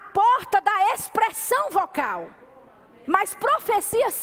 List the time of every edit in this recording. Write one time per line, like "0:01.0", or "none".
0:03.0